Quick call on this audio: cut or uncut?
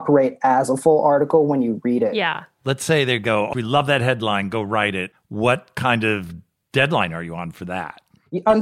cut